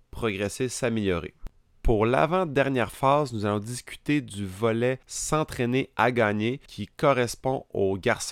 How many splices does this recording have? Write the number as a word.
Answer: two